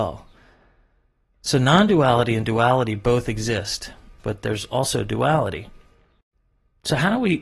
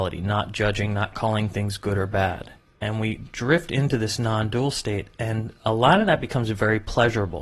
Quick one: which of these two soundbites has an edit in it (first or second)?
first